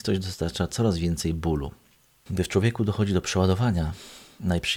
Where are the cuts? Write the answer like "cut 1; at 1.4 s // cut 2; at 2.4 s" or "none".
cut 1; at 2.3 s